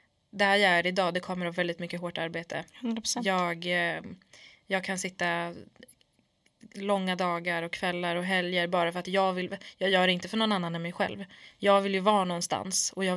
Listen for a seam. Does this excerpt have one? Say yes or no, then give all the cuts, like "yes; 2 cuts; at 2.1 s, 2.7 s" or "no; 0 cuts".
no; 0 cuts